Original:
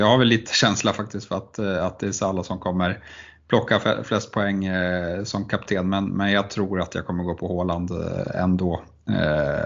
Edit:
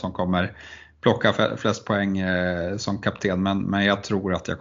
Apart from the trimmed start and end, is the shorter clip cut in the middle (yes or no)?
no